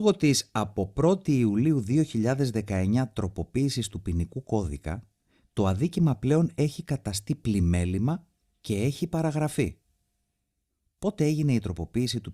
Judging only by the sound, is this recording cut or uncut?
uncut